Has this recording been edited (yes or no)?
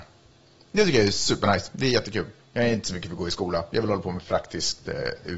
yes